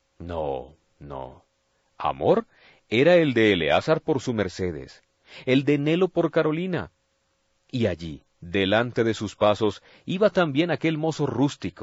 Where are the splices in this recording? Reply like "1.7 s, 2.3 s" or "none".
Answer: none